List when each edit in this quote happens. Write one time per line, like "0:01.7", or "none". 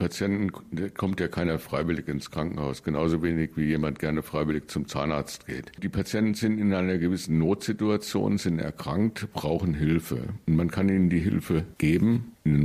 none